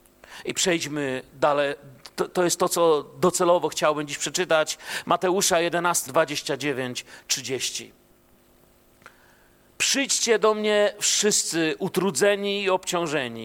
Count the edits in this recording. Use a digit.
2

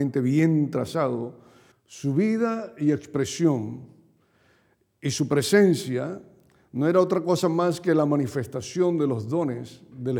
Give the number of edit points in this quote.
1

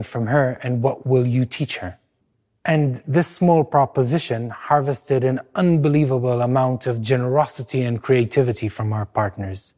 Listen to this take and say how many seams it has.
0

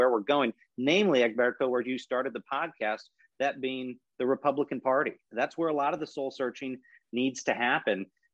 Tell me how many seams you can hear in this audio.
0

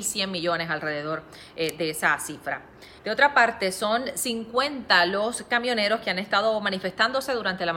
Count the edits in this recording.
1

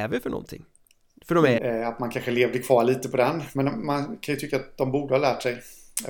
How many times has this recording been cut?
1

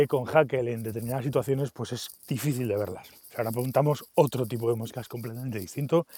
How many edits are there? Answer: 1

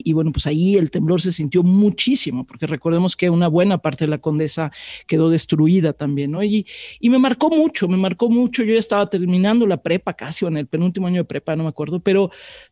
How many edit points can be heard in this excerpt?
0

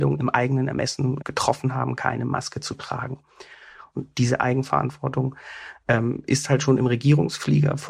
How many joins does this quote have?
2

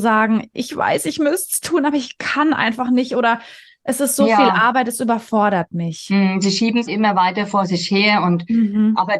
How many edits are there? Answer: 1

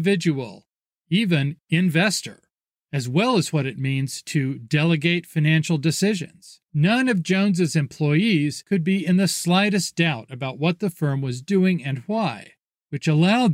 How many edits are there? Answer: 1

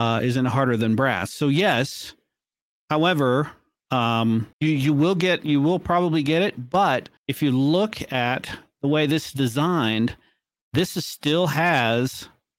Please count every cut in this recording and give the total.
2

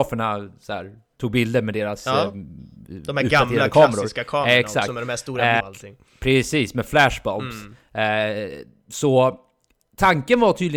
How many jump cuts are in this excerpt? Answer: 1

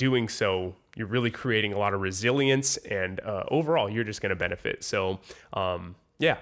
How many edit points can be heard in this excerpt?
1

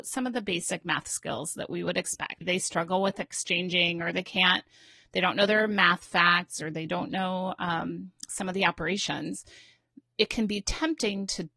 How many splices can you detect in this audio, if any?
1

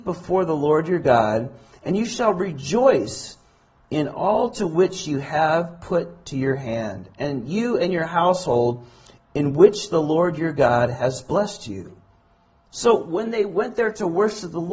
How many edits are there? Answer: 0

